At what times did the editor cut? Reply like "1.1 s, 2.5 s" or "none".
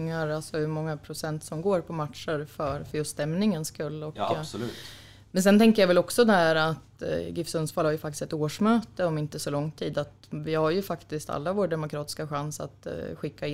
none